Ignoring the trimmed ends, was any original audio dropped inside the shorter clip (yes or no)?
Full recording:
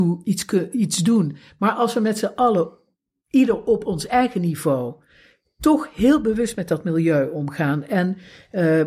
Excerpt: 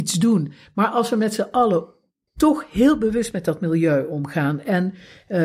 yes